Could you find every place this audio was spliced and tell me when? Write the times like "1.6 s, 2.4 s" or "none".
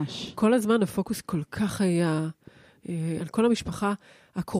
3.2 s